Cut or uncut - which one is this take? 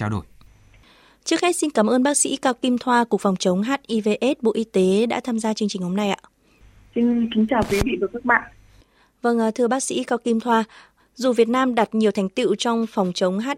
uncut